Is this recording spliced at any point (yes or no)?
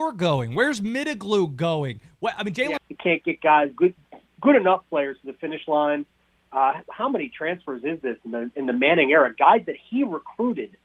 yes